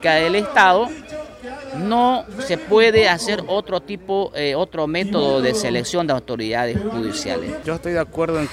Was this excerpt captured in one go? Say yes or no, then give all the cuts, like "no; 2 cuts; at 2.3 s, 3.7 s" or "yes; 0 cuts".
no; 1 cut; at 7.6 s